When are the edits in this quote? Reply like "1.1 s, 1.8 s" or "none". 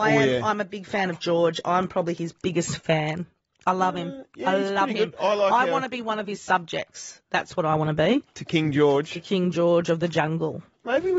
none